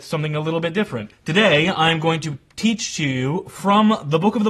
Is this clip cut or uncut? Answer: cut